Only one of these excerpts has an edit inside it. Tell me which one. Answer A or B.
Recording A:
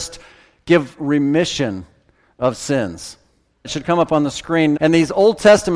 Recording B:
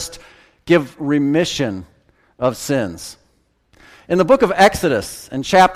A